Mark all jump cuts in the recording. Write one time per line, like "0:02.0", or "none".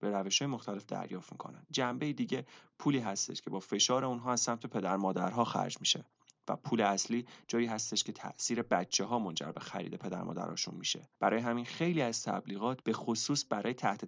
none